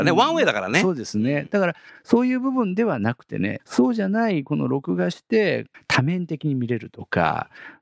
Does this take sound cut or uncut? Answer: cut